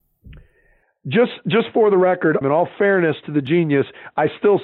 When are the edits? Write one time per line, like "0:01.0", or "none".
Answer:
0:02.4